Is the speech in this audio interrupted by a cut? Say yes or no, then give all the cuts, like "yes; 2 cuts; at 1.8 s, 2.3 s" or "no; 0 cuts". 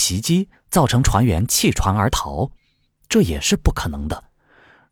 no; 0 cuts